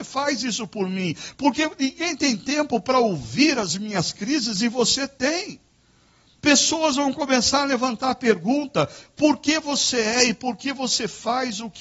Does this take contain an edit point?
yes; 1 cut; at 1.3 s

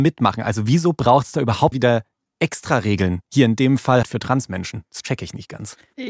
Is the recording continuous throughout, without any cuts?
no; 2 cuts; at 1.7 s, 4.0 s

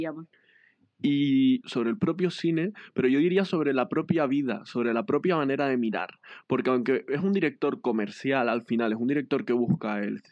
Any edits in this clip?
yes; 1 cut; at 1.6 s

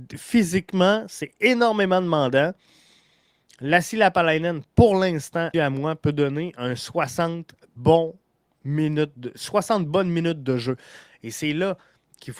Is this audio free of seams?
no; 2 cuts; at 5.5 s, 11.1 s

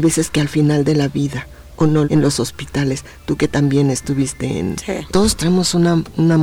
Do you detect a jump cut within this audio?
yes; 2 cuts; at 2.0 s, 5.1 s

